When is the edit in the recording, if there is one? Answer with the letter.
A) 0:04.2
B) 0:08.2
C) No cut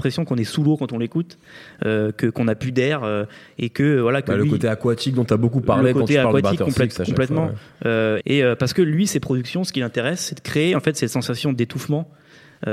B